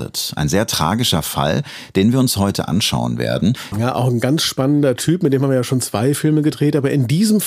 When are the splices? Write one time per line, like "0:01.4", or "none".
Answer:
0:03.7

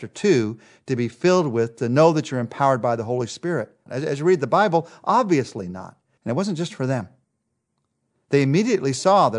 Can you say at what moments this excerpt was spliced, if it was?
0:03.9
0:06.2

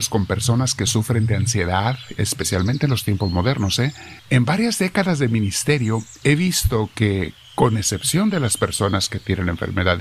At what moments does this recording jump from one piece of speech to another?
0:04.2

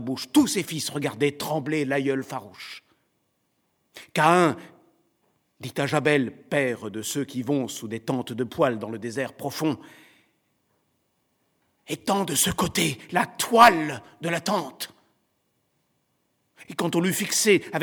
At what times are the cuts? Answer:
0:16.7

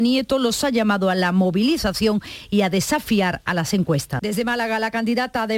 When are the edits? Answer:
0:04.2

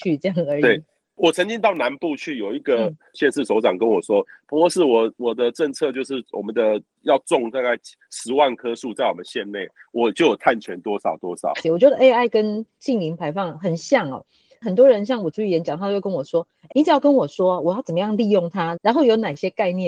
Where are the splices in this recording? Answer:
0:11.6
0:16.7
0:18.8

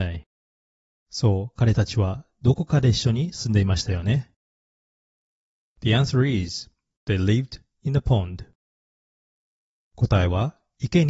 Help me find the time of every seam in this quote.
none

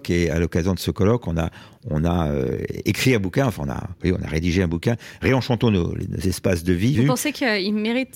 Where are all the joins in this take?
0:06.9

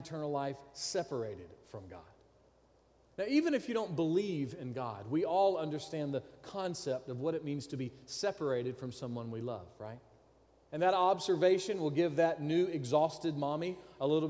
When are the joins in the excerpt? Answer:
0:10.7

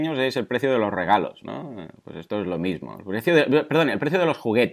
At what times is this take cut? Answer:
none

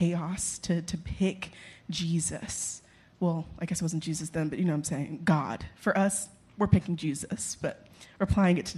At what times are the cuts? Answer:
none

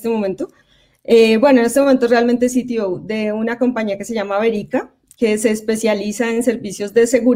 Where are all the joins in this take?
none

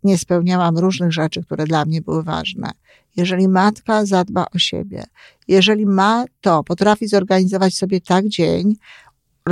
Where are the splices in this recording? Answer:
none

